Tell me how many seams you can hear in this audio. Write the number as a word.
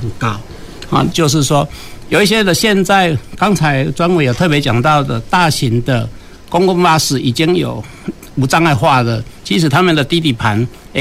one